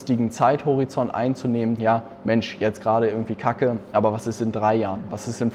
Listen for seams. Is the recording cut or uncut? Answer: cut